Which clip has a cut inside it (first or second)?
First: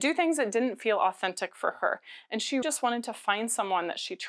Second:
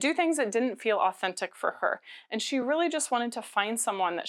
first